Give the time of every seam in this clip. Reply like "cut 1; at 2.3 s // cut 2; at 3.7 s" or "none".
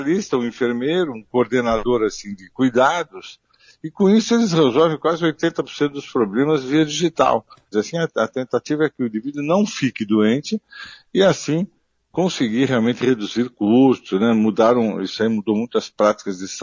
cut 1; at 7.7 s